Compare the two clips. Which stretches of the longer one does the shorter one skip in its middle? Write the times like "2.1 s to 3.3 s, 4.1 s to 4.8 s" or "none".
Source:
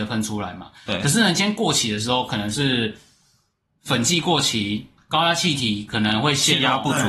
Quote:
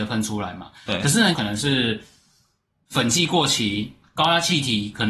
1.3 s to 2.3 s